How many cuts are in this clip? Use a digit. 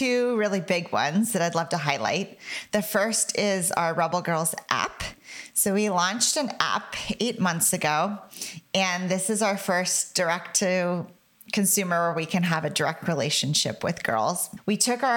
0